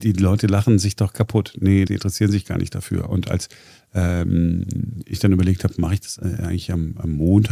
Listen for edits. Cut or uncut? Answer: cut